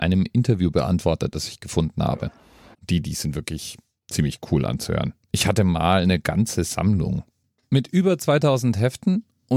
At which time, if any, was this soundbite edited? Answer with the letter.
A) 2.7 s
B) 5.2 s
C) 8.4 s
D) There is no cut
A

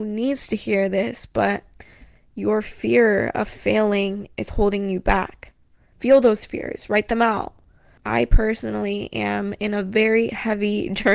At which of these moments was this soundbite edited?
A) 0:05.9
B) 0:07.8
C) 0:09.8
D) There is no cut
A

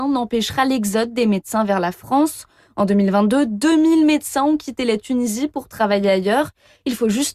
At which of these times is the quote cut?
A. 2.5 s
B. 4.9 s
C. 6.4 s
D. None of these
D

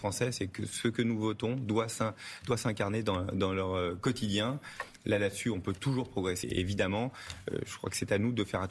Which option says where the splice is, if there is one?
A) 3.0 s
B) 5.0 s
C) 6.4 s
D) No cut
C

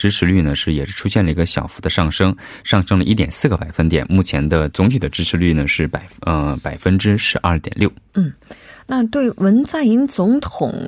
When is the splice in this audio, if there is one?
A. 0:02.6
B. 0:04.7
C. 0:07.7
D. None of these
B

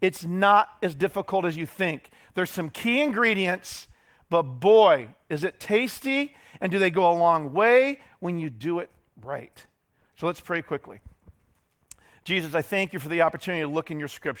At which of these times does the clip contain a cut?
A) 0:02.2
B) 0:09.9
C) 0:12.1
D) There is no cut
D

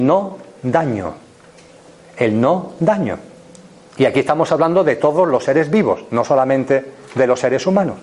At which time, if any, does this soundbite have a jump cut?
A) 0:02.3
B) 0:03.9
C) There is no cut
B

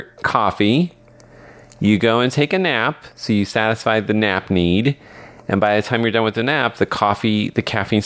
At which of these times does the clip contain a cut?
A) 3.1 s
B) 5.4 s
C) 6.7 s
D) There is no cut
D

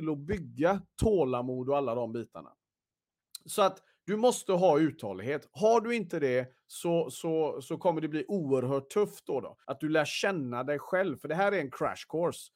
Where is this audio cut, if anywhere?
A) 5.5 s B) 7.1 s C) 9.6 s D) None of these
C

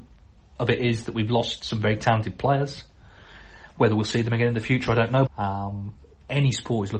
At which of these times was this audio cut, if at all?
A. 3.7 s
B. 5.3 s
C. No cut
B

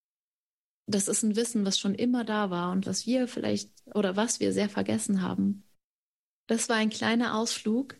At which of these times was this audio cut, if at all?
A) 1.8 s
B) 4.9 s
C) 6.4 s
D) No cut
C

